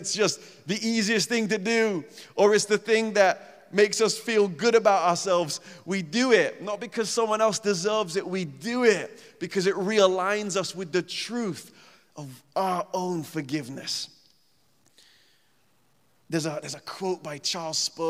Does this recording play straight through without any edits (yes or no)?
yes